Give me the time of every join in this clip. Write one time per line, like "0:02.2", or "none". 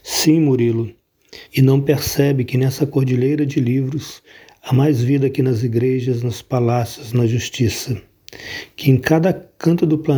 0:01.5